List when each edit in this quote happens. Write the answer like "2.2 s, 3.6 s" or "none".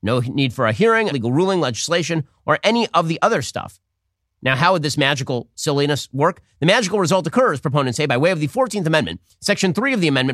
1.1 s

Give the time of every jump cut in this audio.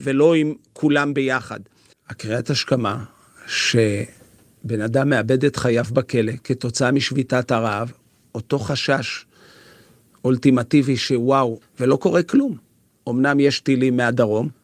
1.9 s, 11.6 s

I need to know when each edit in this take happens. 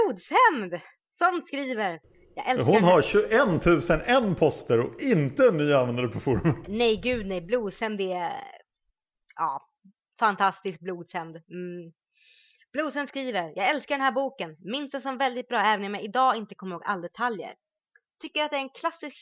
none

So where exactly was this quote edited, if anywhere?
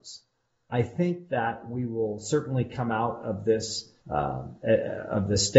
4.0 s

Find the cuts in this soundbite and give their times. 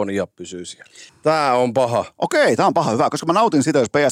1.1 s

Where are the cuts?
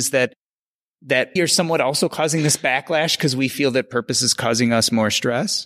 1.4 s

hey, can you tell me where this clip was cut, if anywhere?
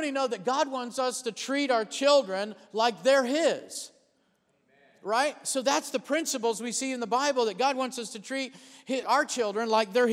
9.0 s

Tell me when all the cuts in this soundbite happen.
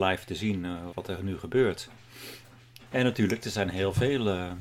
0.9 s, 2.9 s

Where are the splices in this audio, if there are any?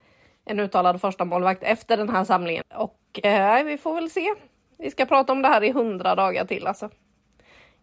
2.6 s

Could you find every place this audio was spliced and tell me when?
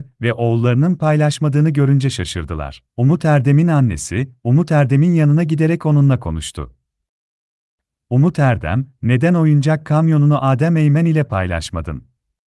2.9 s

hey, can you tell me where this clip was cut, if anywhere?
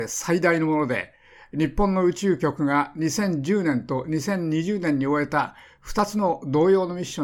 none

